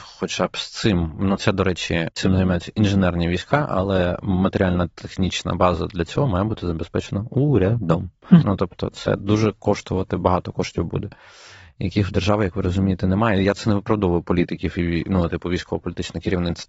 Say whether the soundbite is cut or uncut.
cut